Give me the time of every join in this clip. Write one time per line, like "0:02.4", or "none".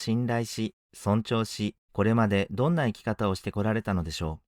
0:01.8